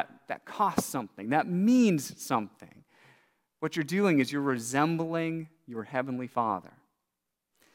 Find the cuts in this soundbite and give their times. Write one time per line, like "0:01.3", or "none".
none